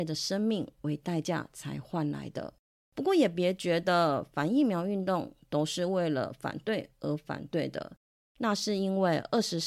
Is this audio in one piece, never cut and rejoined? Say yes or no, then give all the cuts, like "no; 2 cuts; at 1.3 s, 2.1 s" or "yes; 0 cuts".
yes; 0 cuts